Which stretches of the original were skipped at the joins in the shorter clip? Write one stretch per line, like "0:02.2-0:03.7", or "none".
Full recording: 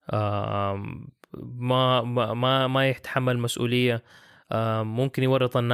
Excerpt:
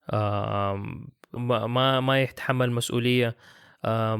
0:01.4-0:02.0